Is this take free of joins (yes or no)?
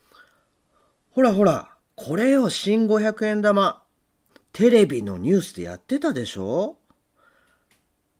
yes